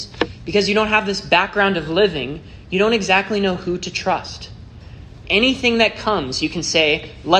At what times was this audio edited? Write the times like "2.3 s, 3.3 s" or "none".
5.2 s